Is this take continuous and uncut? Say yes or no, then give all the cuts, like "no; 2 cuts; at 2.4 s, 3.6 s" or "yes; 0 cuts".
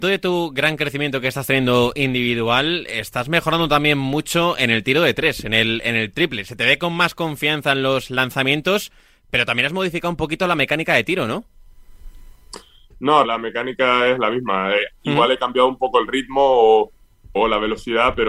no; 2 cuts; at 13.2 s, 17.4 s